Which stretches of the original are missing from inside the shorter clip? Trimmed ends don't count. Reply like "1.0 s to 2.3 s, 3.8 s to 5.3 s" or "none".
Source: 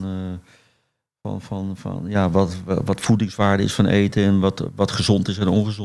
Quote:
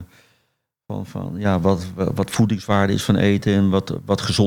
1.4 s to 1.8 s